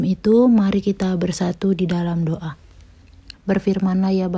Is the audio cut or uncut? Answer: cut